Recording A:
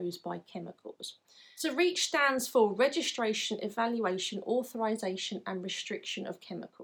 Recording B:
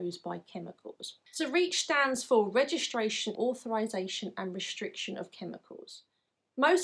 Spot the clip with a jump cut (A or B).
B